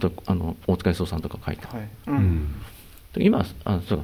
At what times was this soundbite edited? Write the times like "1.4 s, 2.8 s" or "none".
2.0 s